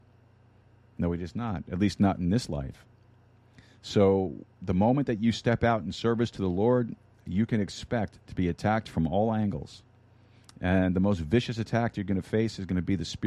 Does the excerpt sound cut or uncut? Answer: uncut